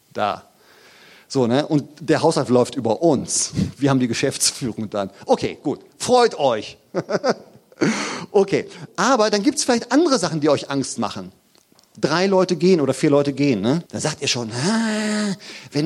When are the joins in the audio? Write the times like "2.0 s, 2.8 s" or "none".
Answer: 8.9 s, 13.9 s